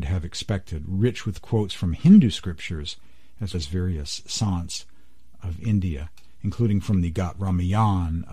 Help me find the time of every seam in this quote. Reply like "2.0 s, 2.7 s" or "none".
3.5 s

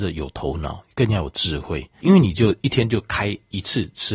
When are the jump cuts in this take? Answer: 2.0 s

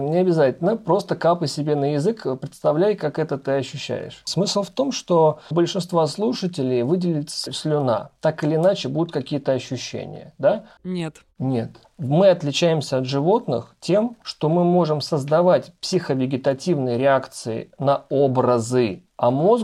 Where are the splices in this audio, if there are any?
10.8 s

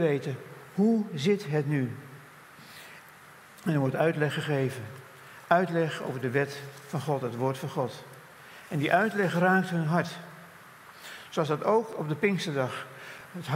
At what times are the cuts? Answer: none

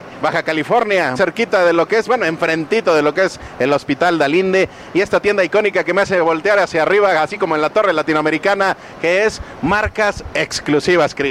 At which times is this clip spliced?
1.1 s

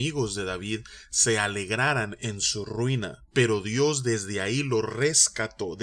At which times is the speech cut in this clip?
3.3 s

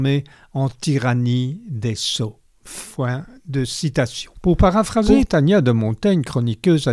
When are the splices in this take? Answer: none

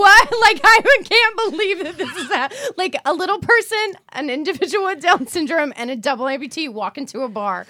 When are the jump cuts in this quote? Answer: none

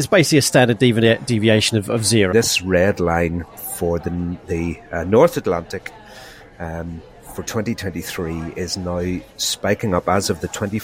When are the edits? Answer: 2.3 s

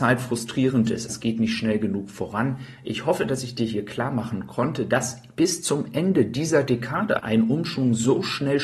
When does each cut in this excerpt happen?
1.1 s, 7.2 s

